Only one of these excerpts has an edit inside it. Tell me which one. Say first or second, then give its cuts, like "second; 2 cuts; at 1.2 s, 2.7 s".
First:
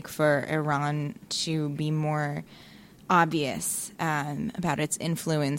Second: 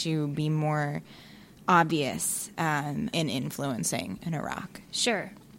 second; 1 cut; at 3.1 s